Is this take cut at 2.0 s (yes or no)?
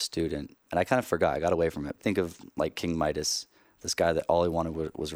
yes